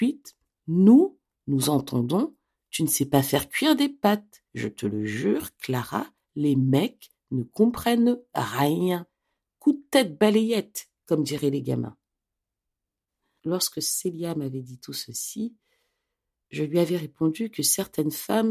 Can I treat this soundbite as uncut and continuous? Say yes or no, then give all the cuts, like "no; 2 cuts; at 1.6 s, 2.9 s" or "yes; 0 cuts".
yes; 0 cuts